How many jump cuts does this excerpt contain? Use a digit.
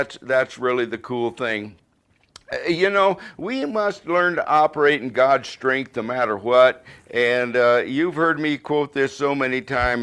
0